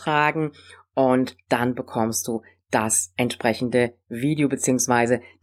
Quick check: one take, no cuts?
yes; 0 cuts

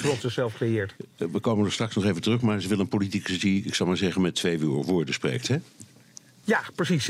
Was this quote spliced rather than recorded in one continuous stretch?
no; 0 cuts

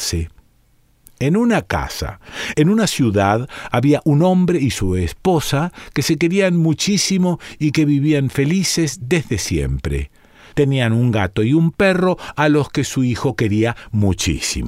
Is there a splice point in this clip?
yes; 2 cuts; at 2.5 s, 10.5 s

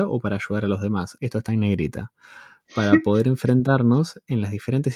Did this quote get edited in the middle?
yes; 1 cut; at 1.2 s

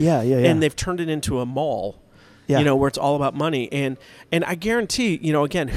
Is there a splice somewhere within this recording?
no; 0 cuts

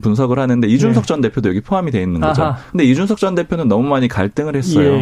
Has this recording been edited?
no; 0 cuts

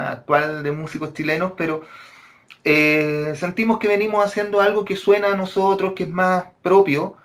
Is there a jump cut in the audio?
no; 0 cuts

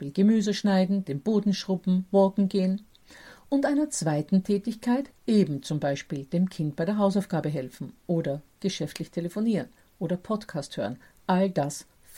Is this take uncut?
no; 1 cut; at 5.1 s

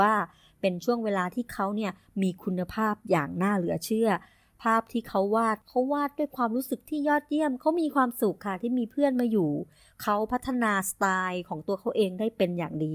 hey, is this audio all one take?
yes; 0 cuts

